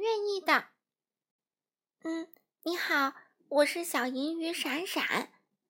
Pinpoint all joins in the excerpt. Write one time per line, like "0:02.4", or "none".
none